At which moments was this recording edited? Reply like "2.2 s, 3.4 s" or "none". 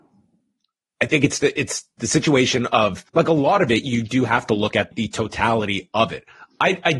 3.1 s, 4.9 s

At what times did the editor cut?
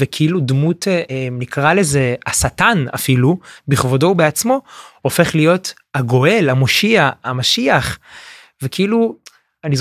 1.1 s

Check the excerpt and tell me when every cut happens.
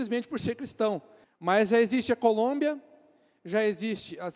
1.2 s

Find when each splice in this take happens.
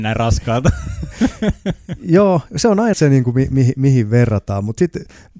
2.9 s

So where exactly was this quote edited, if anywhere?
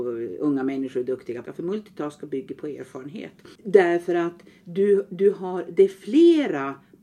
1.5 s, 3.6 s

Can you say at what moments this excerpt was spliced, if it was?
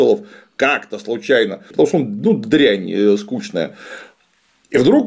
1.7 s

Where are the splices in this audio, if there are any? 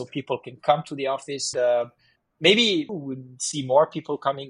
1.5 s, 2.9 s

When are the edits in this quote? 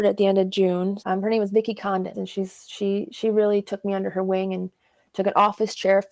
1.0 s, 2.1 s

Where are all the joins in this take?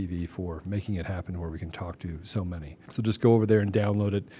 2.9 s

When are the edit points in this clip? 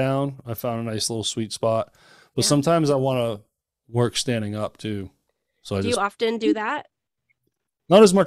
none

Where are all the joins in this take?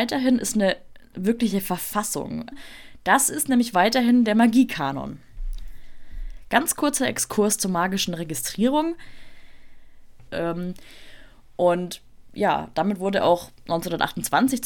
2.5 s, 10.3 s

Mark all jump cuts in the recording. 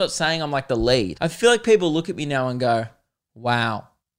1.1 s

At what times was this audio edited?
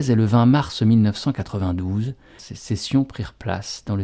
2.4 s

